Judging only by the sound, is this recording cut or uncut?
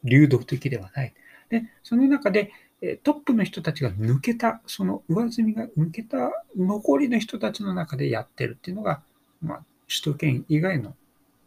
uncut